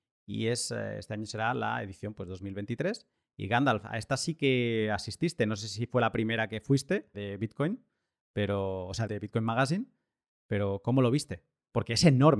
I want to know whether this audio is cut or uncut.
cut